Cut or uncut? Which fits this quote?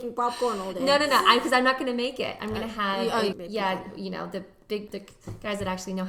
cut